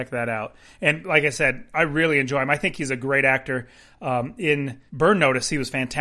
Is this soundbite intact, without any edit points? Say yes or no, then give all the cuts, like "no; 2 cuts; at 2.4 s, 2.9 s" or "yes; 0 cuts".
no; 1 cut; at 4.9 s